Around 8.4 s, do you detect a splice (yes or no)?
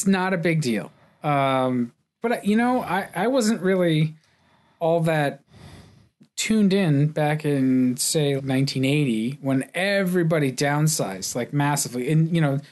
yes